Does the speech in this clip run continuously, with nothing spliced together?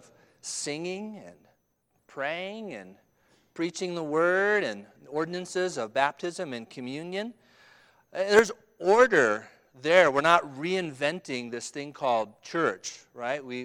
yes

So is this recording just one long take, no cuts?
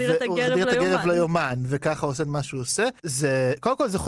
no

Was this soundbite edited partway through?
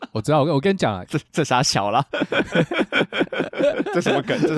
yes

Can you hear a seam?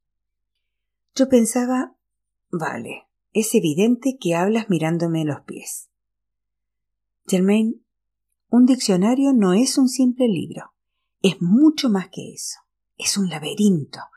no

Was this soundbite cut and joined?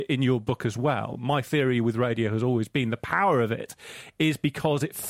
no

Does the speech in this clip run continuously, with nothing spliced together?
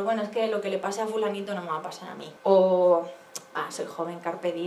no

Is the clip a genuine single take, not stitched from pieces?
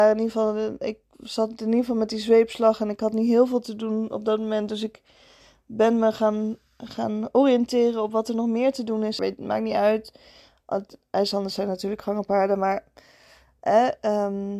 no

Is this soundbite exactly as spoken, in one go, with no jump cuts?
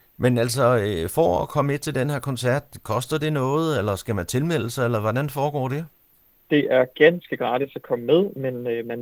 yes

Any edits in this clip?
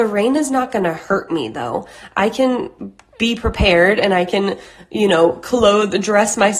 no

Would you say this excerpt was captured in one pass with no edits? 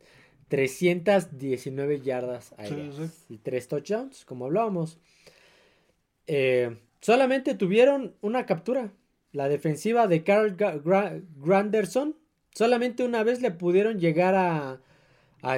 yes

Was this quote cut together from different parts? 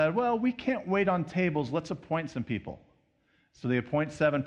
no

